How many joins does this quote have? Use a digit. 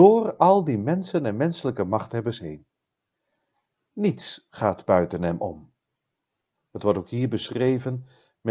0